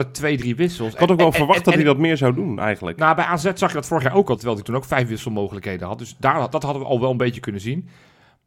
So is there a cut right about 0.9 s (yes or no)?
no